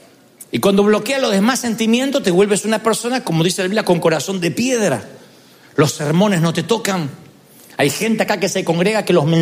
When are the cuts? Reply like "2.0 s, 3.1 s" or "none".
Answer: none